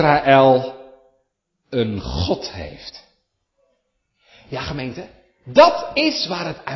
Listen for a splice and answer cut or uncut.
uncut